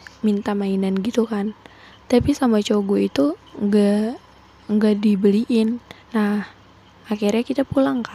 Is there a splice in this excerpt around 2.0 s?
no; 1 cut; at 6.0 s

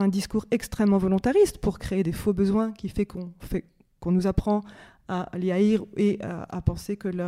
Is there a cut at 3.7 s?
no; 0 cuts

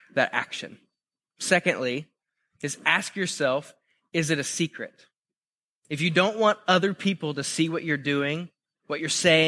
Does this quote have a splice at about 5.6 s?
no; 0 cuts

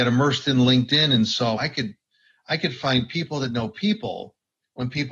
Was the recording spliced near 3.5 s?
no; 1 cut; at 1.6 s

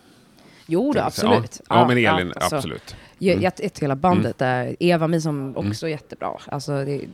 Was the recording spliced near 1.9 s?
no; 2 cuts; at 3.7 s, 5.5 s

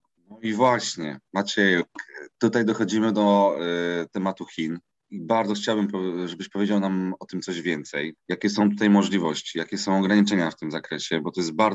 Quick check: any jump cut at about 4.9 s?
no; 1 cut; at 8.2 s

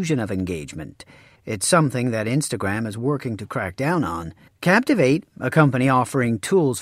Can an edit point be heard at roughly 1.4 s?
yes; 2 cuts; at 1.4 s, 4.5 s

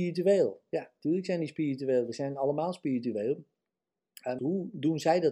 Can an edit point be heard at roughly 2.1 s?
no; 1 cut; at 4.4 s

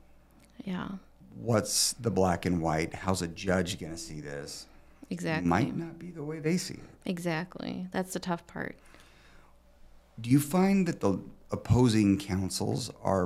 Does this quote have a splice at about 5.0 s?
no; 1 cut; at 1.2 s

